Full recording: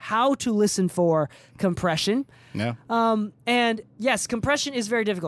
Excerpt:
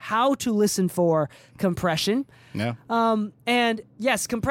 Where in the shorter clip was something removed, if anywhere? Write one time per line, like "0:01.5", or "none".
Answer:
none